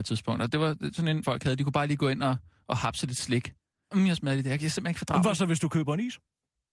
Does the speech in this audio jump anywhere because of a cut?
yes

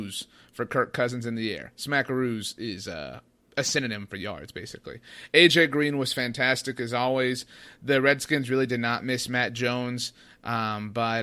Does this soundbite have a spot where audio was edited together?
no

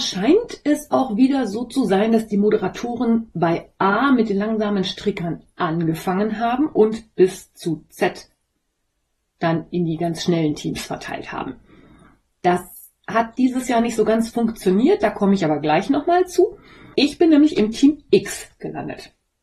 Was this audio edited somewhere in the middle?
yes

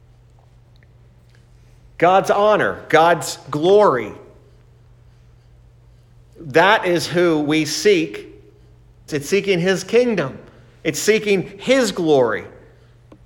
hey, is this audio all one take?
no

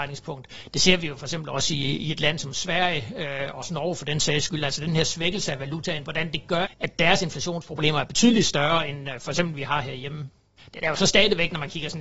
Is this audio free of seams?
no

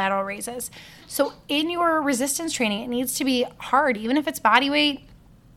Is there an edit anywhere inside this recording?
no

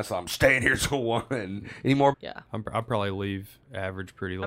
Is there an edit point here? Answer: yes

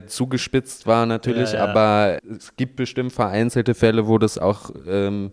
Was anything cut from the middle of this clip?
yes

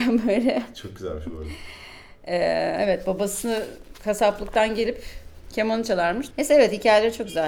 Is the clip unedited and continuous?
no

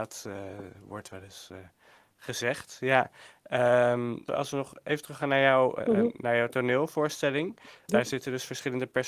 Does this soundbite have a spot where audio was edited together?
yes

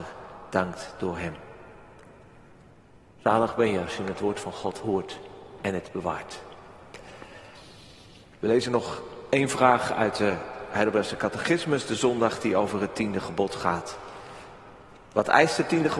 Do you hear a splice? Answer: no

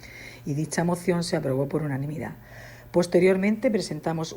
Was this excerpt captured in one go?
yes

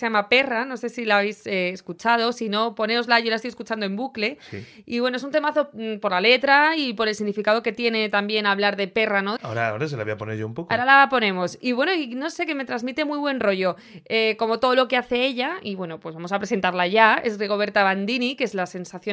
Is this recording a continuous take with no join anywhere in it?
no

